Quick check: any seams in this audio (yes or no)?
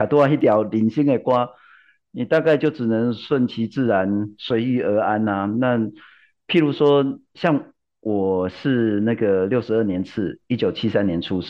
no